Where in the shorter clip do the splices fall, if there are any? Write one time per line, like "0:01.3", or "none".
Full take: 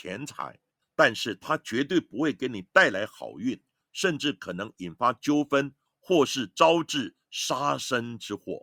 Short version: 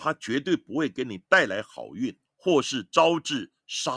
0:02.3